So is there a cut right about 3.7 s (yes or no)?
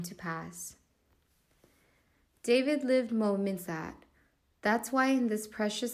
yes